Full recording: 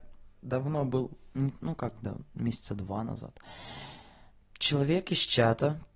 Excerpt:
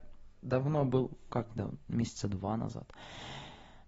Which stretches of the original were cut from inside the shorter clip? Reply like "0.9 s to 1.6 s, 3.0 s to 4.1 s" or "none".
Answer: 1.3 s to 1.8 s